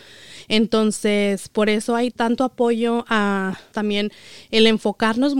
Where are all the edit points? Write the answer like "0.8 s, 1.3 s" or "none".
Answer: 2.1 s, 3.7 s